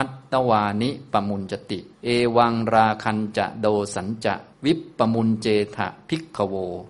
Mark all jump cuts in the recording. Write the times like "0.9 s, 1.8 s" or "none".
1.9 s, 4.5 s